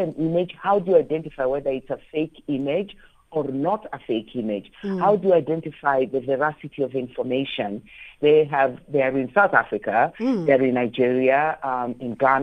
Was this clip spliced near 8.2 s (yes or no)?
yes